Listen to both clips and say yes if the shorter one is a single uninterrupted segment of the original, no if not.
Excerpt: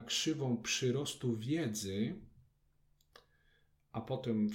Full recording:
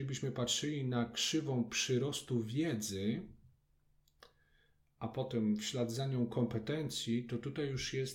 yes